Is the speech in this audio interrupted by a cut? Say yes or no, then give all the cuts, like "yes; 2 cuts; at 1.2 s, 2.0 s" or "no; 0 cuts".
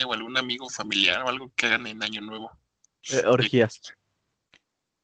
yes; 1 cut; at 1.5 s